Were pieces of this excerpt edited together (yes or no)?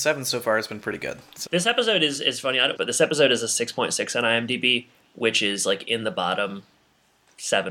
yes